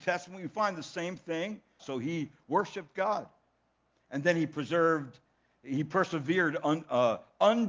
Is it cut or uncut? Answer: cut